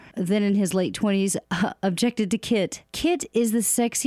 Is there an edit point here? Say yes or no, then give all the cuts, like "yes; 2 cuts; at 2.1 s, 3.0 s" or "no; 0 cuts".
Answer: no; 0 cuts